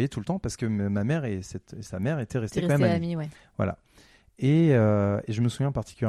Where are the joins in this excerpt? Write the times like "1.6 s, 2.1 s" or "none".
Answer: none